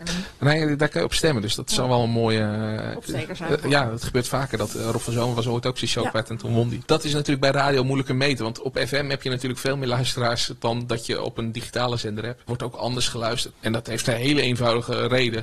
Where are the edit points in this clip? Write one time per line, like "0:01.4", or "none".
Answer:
0:13.5